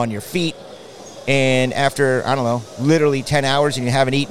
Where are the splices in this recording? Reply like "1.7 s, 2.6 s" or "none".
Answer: none

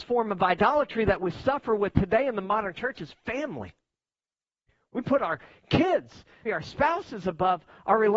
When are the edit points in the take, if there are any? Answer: 6.5 s

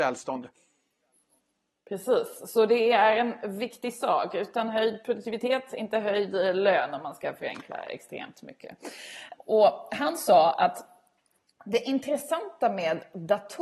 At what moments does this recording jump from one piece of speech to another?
9.3 s

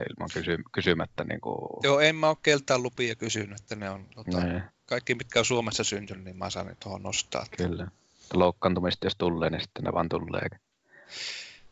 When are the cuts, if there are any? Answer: none

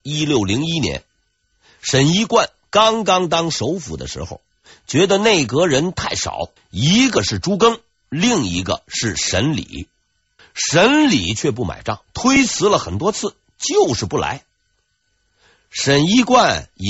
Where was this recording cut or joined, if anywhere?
6.6 s, 10.4 s, 12.0 s

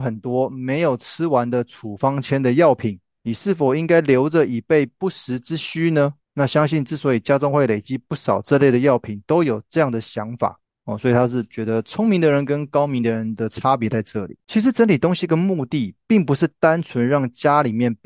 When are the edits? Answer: 10.6 s

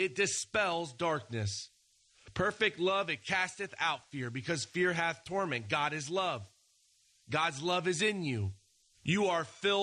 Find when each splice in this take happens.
8.9 s

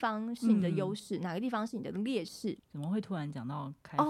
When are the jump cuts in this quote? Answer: 2.6 s

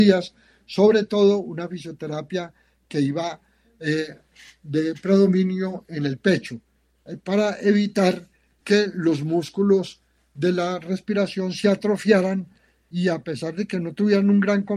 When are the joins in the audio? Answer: 8.6 s

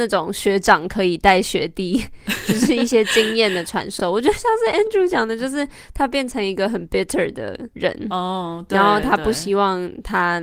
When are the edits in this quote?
none

